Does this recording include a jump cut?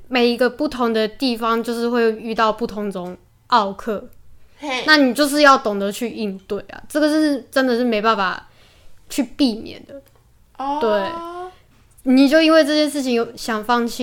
no; 0 cuts

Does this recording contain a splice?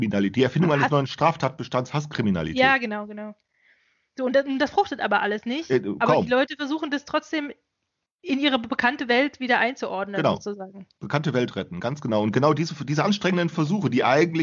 no; 0 cuts

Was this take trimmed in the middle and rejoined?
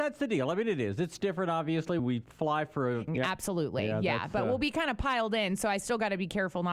yes; 2 cuts; at 2.0 s, 3.1 s

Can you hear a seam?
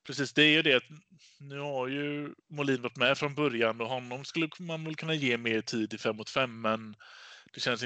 yes; 1 cut; at 2.4 s

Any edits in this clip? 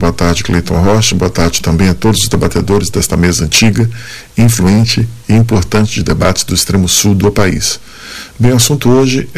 no; 0 cuts

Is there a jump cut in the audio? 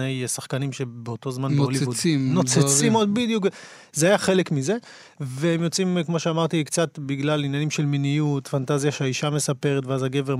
no; 0 cuts

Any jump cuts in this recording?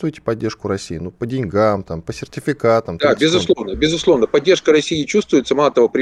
no; 0 cuts

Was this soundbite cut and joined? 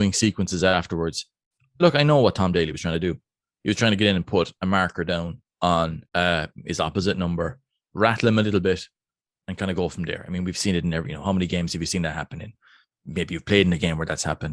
yes; 1 cut; at 6.1 s

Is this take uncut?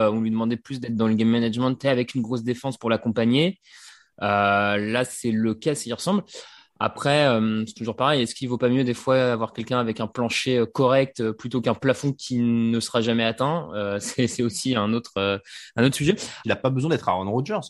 no; 1 cut; at 16.4 s

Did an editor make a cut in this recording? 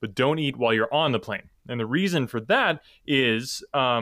no; 0 cuts

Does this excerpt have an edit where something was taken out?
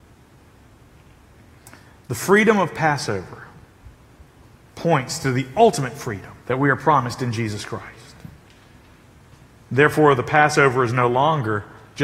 yes; 1 cut; at 6.4 s

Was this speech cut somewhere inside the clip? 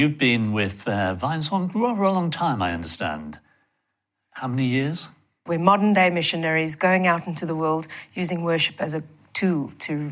yes; 1 cut; at 5.5 s

